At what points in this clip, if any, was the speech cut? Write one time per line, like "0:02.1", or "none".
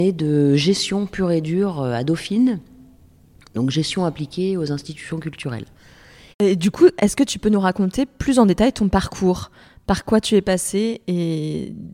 0:06.3